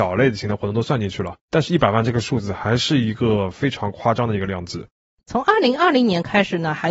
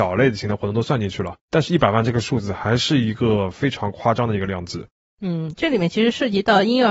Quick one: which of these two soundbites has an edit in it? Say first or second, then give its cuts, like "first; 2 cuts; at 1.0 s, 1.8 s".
first; 1 cut; at 5.2 s